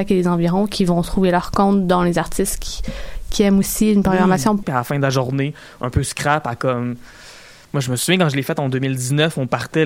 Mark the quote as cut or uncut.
cut